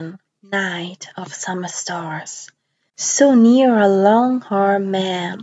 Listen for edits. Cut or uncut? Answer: cut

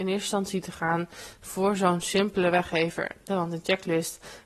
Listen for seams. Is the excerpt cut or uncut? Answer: cut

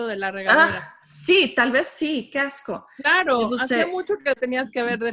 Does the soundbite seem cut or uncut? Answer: uncut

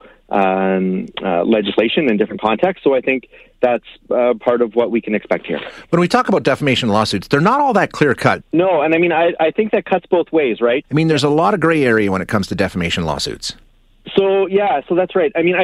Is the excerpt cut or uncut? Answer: cut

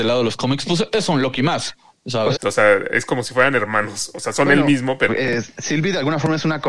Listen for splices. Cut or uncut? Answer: cut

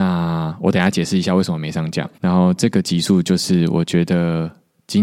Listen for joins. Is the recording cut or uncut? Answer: cut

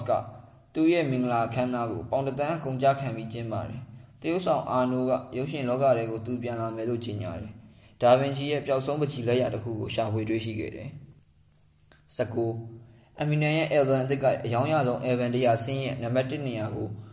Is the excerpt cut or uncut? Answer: cut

